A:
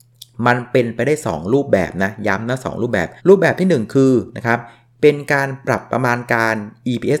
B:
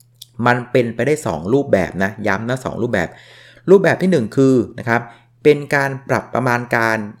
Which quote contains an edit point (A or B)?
A